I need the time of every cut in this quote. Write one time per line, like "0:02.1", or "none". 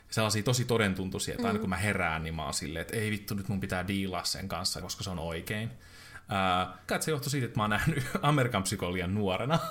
0:04.8
0:06.9